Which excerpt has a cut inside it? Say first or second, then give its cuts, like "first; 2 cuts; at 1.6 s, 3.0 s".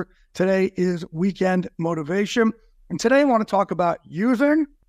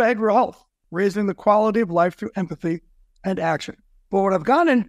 second; 1 cut; at 4.0 s